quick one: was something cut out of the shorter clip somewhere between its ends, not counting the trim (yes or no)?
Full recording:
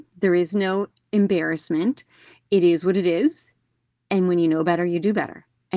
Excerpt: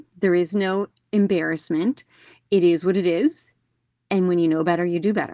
no